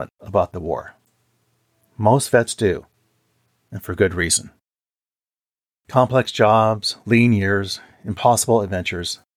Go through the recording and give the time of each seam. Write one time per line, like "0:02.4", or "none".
none